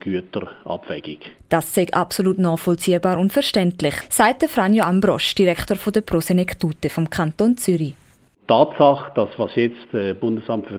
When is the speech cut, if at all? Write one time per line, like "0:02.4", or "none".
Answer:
0:01.4